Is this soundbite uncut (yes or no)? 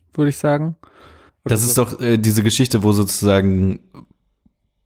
no